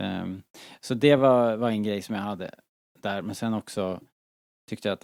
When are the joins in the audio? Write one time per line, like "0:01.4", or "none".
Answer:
none